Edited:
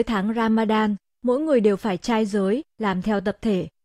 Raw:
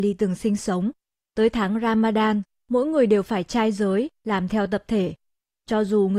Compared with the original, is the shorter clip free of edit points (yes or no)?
yes